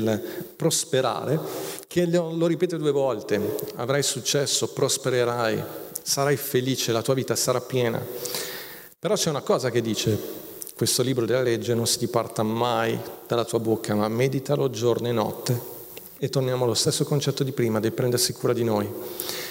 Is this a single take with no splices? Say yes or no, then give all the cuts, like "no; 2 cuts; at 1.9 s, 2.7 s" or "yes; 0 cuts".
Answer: yes; 0 cuts